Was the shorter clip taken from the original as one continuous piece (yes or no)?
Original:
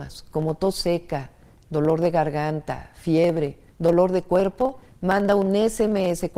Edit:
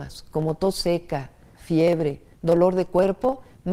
no